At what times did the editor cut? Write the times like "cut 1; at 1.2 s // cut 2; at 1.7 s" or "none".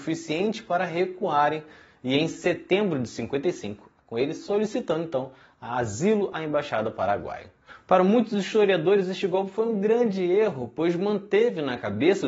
cut 1; at 4.0 s